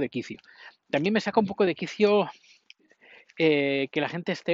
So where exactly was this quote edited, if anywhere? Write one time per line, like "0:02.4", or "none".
none